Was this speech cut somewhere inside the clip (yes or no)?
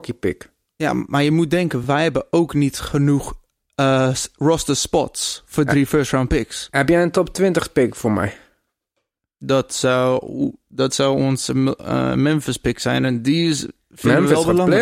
no